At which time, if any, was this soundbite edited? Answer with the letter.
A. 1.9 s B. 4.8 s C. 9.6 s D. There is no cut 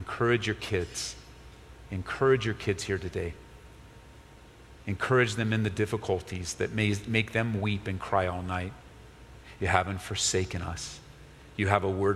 C